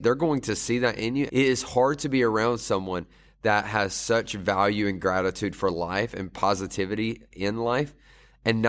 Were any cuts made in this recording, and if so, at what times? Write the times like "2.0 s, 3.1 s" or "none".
1.3 s